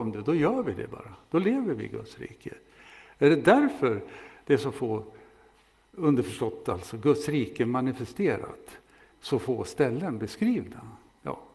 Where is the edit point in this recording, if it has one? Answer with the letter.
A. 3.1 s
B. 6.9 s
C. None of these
C